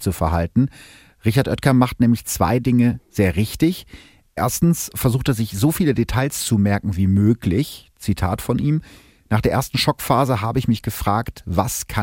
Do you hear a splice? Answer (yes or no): no